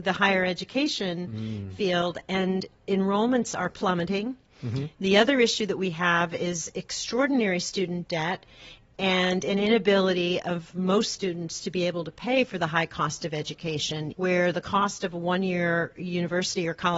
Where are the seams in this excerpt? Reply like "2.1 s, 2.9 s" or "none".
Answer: 14.1 s